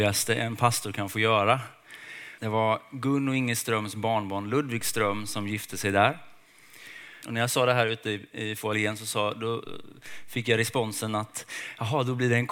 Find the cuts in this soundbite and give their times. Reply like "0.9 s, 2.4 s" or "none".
2.4 s, 7.2 s